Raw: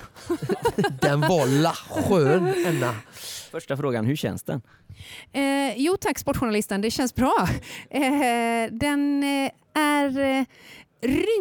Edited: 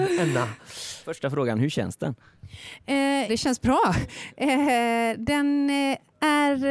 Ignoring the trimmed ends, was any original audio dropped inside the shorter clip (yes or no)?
yes